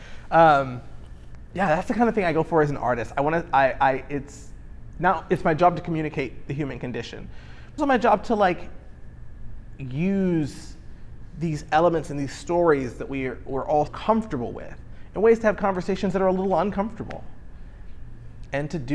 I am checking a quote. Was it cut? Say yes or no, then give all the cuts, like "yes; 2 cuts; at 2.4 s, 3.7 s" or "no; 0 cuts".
yes; 2 cuts; at 7.8 s, 13.9 s